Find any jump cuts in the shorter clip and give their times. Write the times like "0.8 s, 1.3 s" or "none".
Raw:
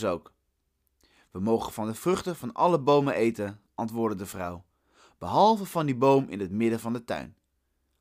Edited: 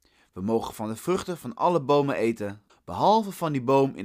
2.7 s